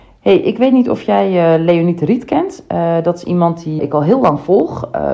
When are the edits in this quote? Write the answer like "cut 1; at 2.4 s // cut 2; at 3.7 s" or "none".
cut 1; at 3.8 s